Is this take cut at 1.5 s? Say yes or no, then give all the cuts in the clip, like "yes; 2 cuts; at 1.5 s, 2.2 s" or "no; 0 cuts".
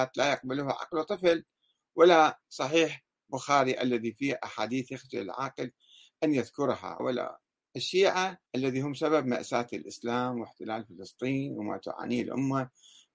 no; 2 cuts; at 7.0 s, 8.5 s